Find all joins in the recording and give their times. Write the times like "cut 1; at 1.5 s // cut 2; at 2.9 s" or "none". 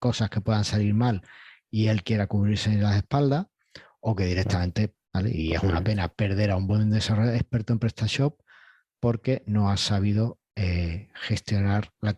cut 1; at 5.0 s